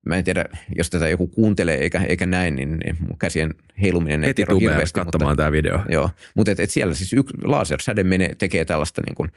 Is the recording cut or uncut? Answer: uncut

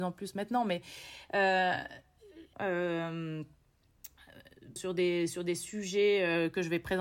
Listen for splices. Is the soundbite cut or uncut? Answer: cut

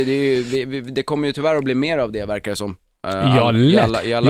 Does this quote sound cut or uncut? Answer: uncut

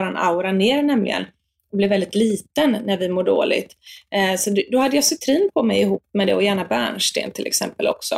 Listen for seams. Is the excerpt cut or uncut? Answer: uncut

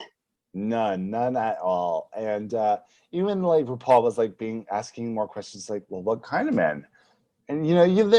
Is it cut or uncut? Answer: uncut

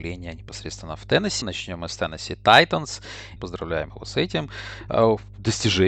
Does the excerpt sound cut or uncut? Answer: cut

